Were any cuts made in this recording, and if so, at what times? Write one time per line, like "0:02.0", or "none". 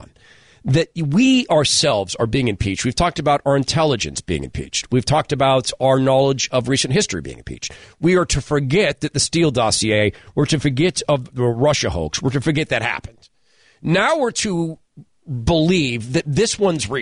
none